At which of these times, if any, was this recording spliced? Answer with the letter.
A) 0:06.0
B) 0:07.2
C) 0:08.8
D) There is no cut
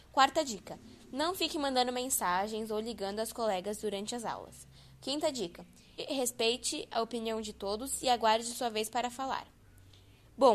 A